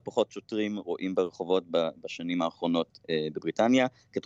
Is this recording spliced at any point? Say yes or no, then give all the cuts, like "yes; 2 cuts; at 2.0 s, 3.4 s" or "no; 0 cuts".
no; 0 cuts